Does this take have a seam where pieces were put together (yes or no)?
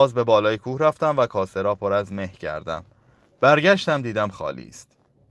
no